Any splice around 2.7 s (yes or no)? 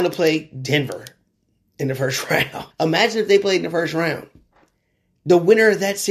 yes